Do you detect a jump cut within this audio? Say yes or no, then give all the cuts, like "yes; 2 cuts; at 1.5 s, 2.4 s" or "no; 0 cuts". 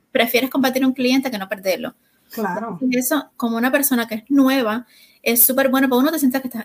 yes; 1 cut; at 3.3 s